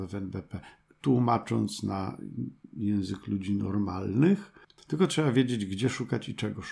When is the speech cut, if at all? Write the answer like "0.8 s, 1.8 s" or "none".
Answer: 4.8 s